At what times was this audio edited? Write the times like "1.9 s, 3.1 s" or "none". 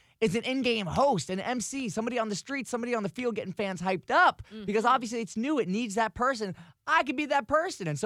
none